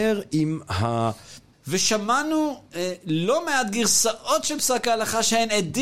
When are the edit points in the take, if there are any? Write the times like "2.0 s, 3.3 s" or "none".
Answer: 1.5 s